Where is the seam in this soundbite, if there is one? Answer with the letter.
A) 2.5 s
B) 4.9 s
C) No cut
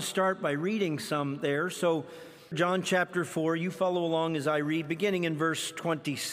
A